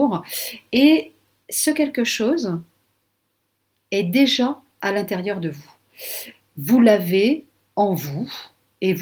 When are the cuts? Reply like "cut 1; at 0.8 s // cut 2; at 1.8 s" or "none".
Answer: none